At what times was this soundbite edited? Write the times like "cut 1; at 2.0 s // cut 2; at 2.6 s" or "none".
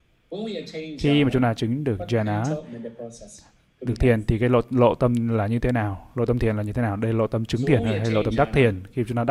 none